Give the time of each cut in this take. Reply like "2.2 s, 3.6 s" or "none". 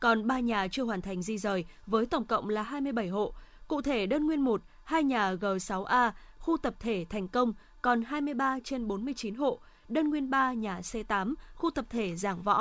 none